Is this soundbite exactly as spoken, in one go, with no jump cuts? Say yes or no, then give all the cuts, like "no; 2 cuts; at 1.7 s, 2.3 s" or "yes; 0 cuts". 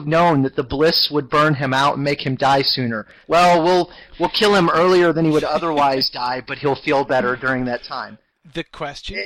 no; 1 cut; at 3.2 s